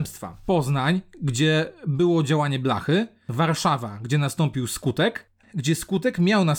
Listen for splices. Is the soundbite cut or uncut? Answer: cut